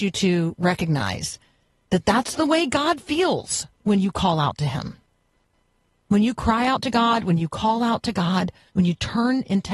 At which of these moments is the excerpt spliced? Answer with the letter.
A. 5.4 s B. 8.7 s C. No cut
B